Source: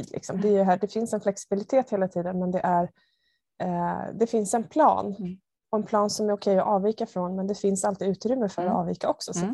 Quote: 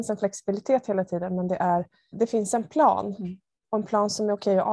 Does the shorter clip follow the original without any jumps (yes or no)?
no